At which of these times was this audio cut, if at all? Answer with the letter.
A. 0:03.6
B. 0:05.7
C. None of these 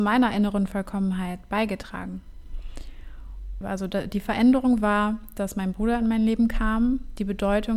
A